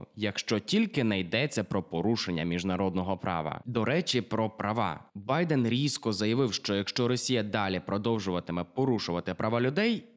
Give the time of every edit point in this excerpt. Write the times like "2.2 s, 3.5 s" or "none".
none